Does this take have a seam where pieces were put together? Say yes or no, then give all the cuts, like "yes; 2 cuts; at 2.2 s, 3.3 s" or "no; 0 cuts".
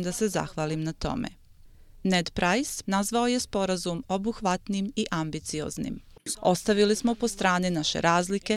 yes; 2 cuts; at 2.8 s, 6.3 s